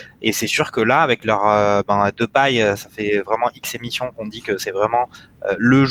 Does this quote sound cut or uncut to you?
uncut